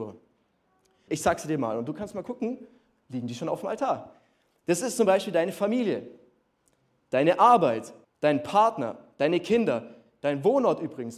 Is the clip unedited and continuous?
no; 2 cuts; at 1.1 s, 8.0 s

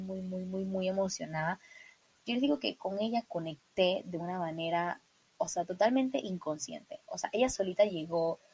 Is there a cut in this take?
no; 0 cuts

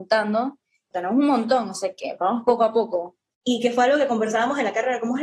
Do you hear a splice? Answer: yes; 2 cuts; at 0.9 s, 3.3 s

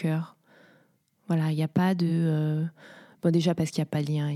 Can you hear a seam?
no; 0 cuts

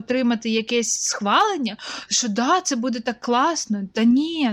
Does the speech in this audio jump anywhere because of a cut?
no; 0 cuts

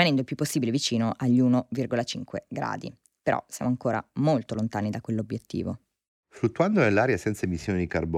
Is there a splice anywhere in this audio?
yes; 1 cut; at 6.1 s

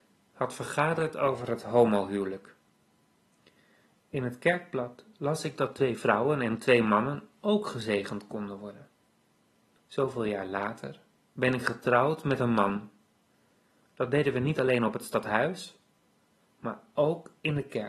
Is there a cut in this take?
yes; 1 cut; at 9.8 s

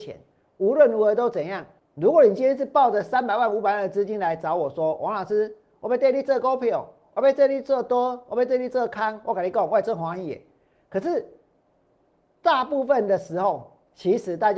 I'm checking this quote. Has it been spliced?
yes; 1 cut; at 1.8 s

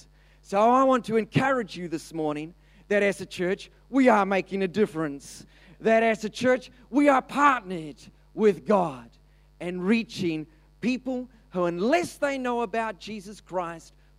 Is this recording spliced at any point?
no; 0 cuts

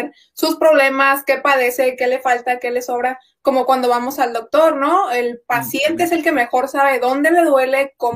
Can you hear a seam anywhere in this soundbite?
no; 0 cuts

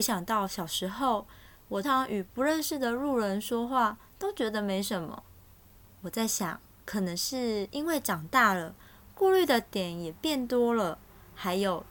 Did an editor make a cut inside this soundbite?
yes; 1 cut; at 1.8 s

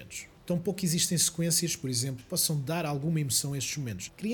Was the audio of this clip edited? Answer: yes; 1 cut; at 2.2 s

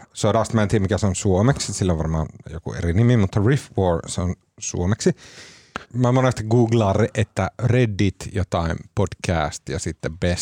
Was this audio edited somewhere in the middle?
yes; 1 cut; at 5.8 s

